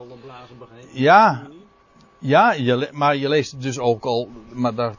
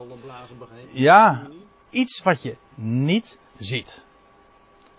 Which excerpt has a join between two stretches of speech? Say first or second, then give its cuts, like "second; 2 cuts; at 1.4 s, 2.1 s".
second; 2 cuts; at 1.9 s, 3.5 s